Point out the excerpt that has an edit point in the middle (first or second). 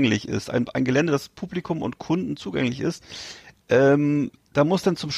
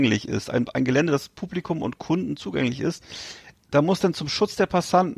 second